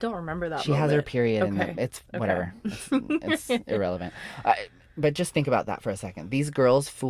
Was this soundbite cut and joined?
no; 0 cuts

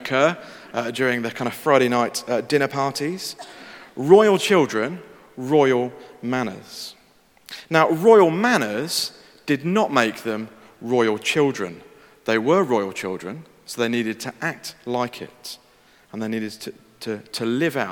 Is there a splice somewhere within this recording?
no; 0 cuts

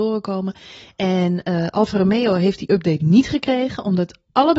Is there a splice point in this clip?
no; 0 cuts

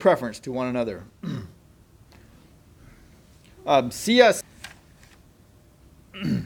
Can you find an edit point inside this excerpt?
yes; 1 cut; at 4.4 s

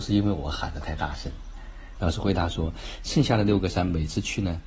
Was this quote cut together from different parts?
yes; 1 cut; at 2.0 s

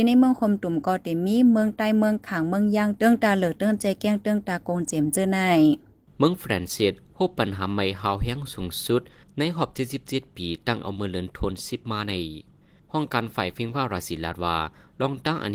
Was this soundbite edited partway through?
no; 0 cuts

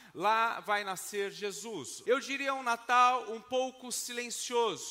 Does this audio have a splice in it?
yes; 1 cut; at 2.0 s

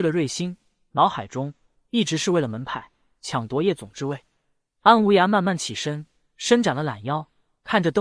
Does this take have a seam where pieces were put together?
no; 0 cuts

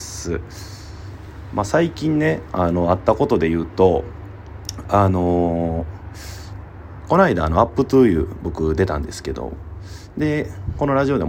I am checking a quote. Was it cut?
no; 0 cuts

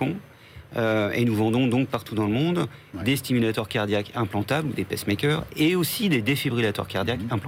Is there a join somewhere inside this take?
no; 0 cuts

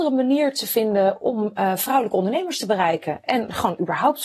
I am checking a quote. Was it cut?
no; 0 cuts

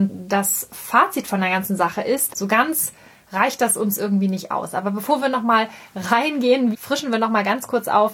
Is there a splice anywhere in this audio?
yes; 2 cuts; at 2.3 s, 6.7 s

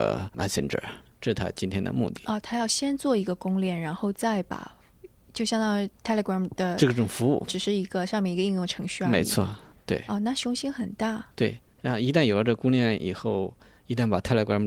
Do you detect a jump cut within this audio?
no; 0 cuts

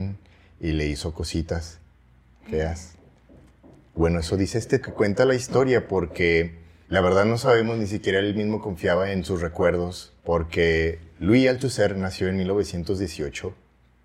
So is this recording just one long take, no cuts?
no; 3 cuts; at 4.8 s, 6.8 s, 10.2 s

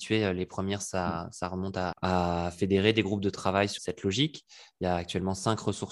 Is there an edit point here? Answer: yes; 2 cuts; at 1.9 s, 3.8 s

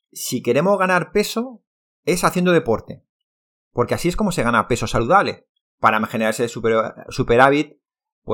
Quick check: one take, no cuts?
no; 1 cut; at 5.6 s

